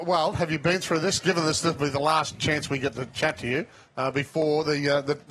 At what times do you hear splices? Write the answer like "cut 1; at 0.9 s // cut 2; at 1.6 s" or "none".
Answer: none